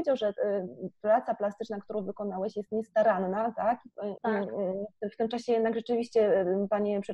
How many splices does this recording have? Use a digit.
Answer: 1